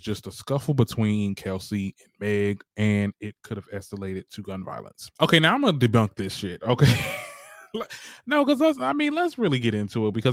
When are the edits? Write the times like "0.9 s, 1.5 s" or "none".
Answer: none